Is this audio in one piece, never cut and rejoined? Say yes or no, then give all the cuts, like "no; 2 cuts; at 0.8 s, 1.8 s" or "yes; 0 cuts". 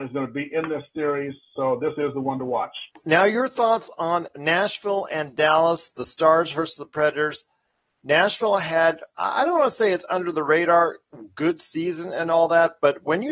no; 1 cut; at 2.9 s